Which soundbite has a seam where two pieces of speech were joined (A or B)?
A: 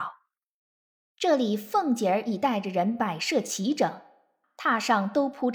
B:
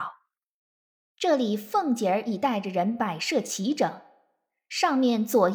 A